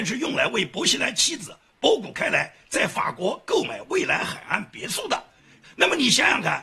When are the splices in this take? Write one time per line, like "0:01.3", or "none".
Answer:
0:05.6